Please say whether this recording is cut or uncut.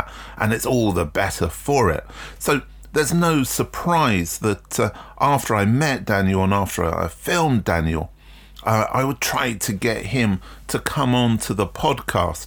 cut